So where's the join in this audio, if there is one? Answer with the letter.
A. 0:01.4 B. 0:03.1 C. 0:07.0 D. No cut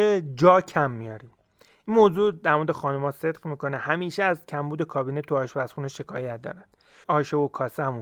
C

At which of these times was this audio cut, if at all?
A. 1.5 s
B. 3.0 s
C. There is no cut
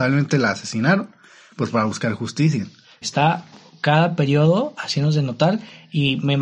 B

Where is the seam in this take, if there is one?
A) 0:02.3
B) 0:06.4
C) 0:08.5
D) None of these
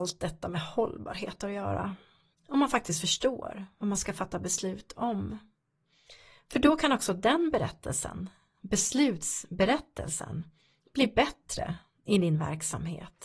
A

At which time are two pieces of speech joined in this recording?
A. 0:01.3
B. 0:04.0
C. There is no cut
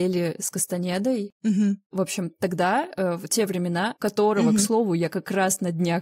B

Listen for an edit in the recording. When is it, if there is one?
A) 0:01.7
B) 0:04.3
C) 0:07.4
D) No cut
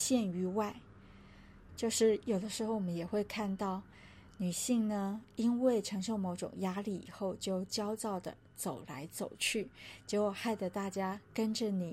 A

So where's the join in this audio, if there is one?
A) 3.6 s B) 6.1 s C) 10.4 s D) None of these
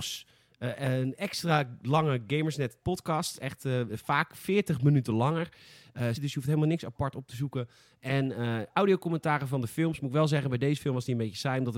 B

